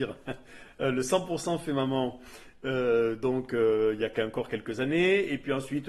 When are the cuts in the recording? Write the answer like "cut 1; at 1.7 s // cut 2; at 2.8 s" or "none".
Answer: none